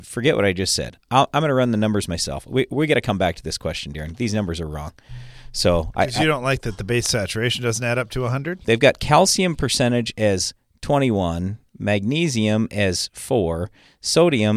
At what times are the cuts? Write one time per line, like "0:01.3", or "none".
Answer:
0:08.6